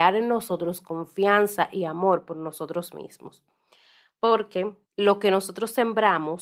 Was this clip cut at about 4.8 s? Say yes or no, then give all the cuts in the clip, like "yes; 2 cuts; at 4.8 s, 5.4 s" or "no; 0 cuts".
yes; 1 cut; at 4.8 s